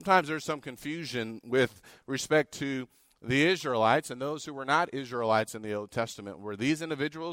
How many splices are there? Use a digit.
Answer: 0